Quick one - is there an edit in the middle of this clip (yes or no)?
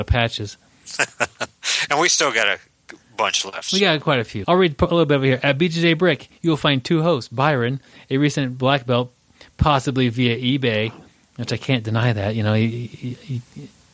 yes